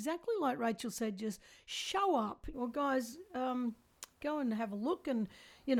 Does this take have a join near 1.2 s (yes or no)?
no